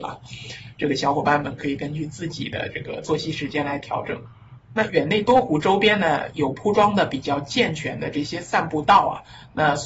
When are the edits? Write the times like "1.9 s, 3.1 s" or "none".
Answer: none

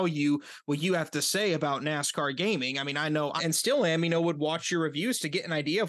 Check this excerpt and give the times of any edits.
3.4 s

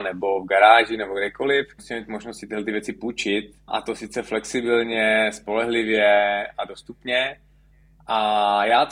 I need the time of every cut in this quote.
none

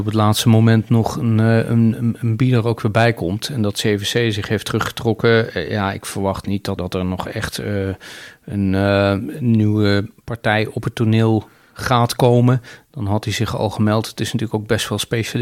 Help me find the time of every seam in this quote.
6.8 s

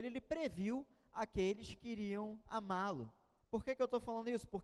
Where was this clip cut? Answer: 3.4 s

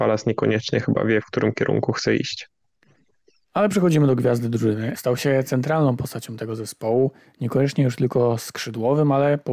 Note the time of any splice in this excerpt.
5.0 s

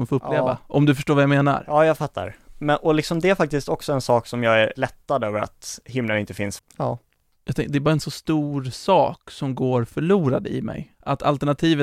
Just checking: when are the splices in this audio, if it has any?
6.6 s

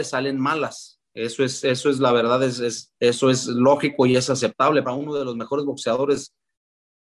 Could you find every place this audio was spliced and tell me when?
3.0 s, 4.8 s

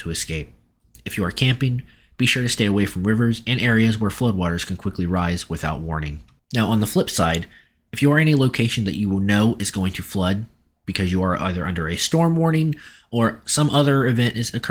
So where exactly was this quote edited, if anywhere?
none

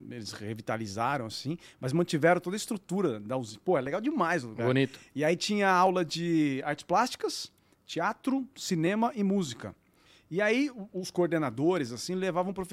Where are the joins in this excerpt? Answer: none

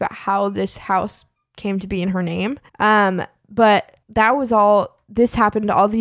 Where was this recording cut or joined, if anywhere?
2.7 s, 4.0 s

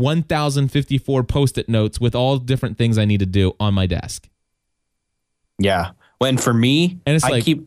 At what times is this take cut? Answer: none

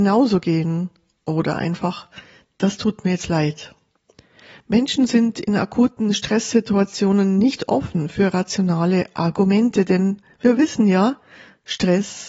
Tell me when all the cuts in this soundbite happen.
none

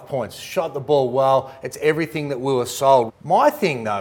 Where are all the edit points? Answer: 3.1 s

